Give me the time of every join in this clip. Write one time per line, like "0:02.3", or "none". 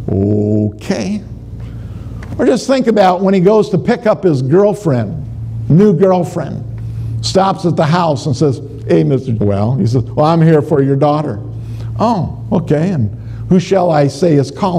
0:09.4